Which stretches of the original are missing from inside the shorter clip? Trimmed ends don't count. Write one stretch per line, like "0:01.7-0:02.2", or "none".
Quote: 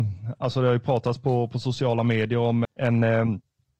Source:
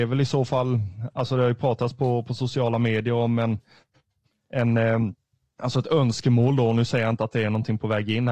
0:03.4-0:04.4

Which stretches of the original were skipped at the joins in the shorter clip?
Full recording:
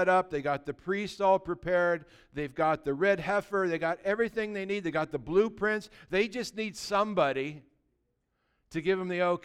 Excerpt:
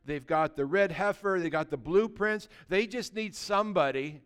0:03.7-0:04.8

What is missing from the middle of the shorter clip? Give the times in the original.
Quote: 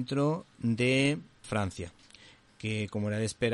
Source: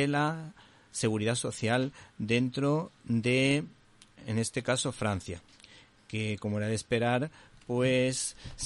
0:03.9-0:04.9

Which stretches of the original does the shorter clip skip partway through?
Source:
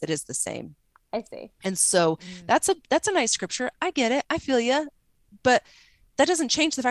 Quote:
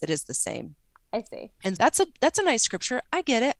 0:01.8-0:02.4

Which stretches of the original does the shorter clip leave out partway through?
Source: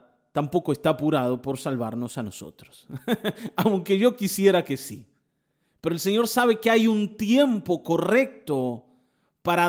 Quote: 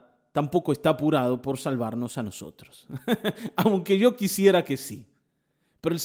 none

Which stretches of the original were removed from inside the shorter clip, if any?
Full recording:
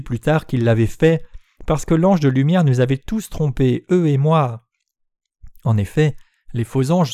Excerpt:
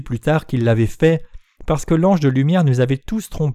none

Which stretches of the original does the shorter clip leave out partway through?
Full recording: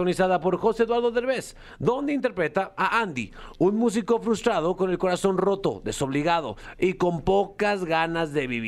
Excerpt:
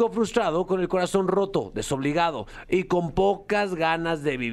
none

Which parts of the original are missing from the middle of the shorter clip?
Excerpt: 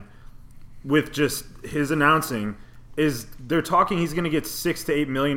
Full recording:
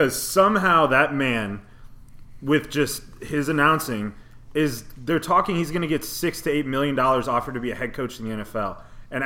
none

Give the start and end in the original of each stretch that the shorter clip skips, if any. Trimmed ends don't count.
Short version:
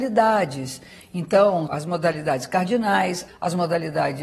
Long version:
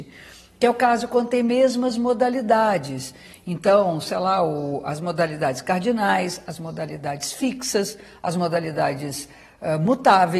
0:04.0-0:04.8
0:06.4-0:08.1

